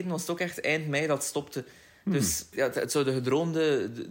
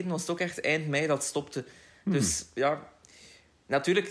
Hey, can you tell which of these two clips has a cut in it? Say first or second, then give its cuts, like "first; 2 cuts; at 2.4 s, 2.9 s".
first; 1 cut; at 2.5 s